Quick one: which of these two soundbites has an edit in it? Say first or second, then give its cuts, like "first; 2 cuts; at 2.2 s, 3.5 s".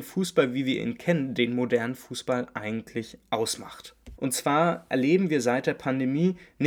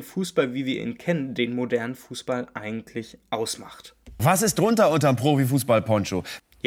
first; 1 cut; at 4.2 s